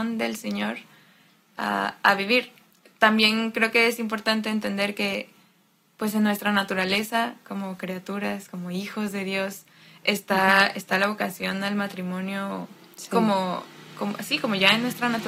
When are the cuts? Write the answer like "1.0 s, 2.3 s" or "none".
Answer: none